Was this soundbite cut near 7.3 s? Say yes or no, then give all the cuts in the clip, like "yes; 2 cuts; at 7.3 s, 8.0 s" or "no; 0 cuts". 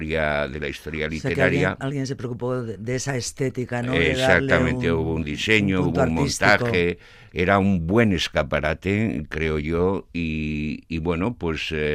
yes; 1 cut; at 7.3 s